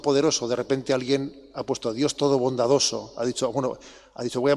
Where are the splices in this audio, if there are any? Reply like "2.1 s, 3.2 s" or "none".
none